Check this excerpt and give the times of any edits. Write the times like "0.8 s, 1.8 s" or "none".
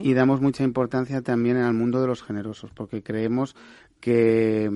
none